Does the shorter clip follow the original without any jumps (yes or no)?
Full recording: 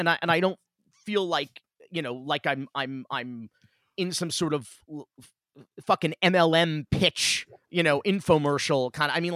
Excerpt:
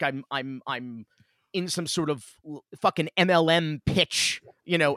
no